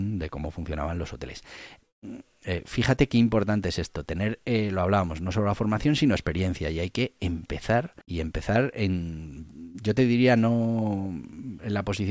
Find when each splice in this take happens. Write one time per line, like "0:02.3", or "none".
0:08.0